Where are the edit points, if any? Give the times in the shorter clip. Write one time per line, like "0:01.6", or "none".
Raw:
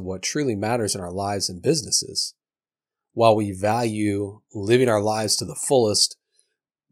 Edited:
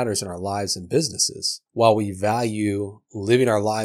0:01.7